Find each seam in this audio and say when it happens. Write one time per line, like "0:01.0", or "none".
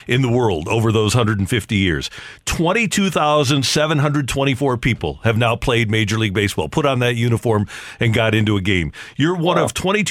none